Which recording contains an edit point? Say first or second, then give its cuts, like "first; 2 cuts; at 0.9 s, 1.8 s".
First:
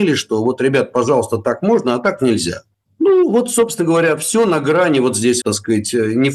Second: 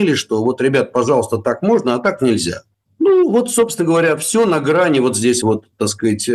first; 1 cut; at 5.4 s